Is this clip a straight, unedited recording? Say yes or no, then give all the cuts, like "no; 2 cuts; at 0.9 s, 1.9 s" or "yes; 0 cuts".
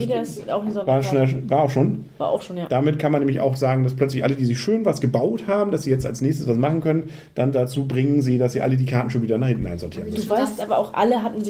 yes; 0 cuts